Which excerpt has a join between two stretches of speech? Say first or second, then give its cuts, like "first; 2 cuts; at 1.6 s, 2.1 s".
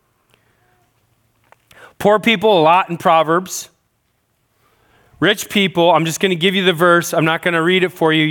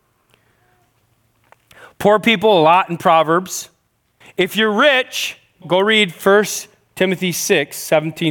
second; 2 cuts; at 4.2 s, 5.6 s